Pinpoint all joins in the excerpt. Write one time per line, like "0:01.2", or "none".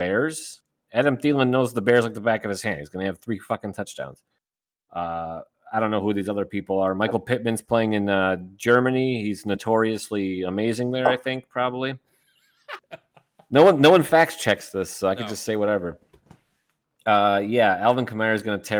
0:12.8